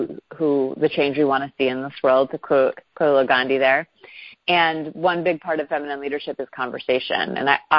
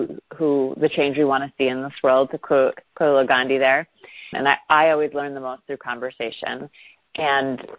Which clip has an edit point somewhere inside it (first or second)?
second